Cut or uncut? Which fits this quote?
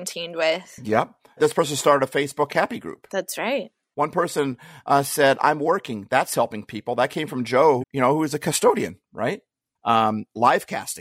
cut